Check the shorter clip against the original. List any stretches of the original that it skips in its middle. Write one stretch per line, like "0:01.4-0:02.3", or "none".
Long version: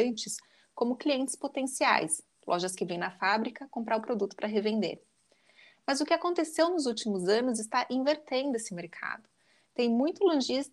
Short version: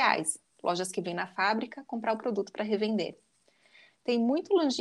0:05.7-0:09.6